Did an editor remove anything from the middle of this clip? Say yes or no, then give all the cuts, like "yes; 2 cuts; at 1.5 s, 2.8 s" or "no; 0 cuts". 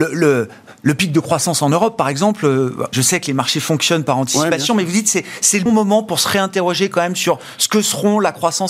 yes; 2 cuts; at 2.9 s, 5.7 s